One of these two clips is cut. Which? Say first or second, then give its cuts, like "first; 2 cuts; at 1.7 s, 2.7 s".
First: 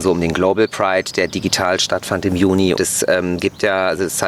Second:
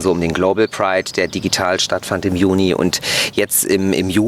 first; 1 cut; at 2.8 s